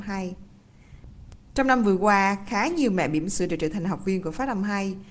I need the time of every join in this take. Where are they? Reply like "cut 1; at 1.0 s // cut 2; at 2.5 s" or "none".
none